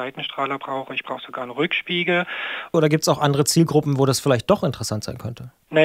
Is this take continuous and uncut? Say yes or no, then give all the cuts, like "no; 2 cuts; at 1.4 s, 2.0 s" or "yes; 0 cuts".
no; 1 cut; at 2.7 s